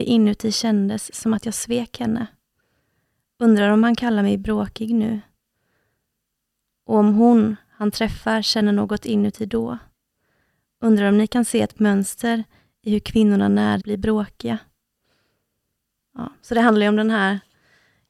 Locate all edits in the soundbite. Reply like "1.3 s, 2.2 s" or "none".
13.8 s